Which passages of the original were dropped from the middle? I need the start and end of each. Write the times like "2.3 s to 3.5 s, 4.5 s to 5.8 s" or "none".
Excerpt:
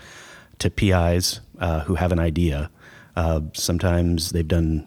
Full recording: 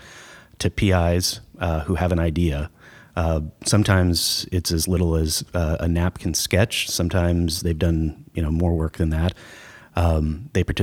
3.5 s to 6.8 s